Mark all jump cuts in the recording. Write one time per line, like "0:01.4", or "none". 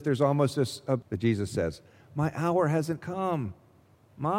0:01.0

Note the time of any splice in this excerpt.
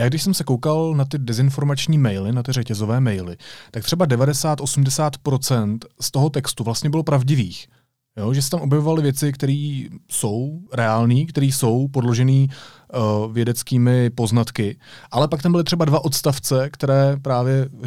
none

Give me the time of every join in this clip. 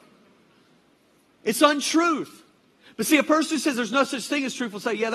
none

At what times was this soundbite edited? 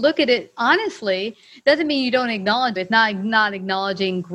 0:02.8

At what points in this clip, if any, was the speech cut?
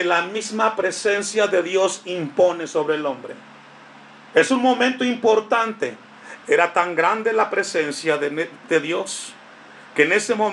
0:04.3
0:06.4

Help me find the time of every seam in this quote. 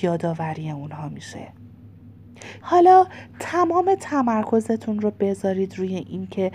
0:02.6

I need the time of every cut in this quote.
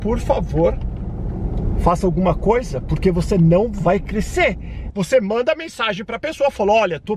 0:04.9

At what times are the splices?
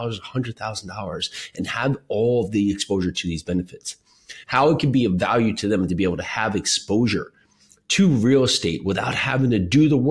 0:04.4

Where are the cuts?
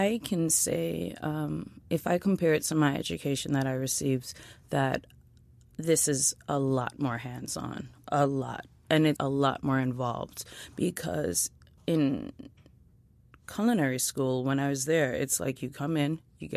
0:09.2

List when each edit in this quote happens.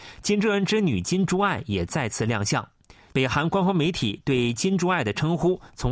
0:03.1

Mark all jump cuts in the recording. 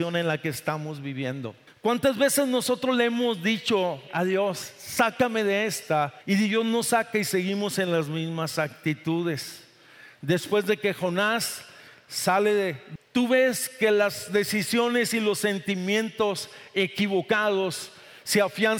0:04.1
0:13.0

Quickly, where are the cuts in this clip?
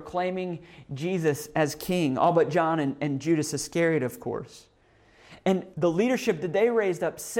0:05.7

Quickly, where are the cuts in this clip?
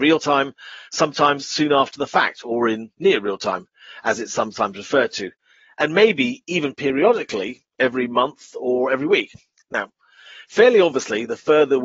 none

